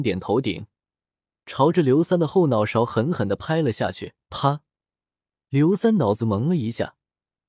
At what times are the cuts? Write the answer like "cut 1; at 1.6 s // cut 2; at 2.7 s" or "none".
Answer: cut 1; at 4.2 s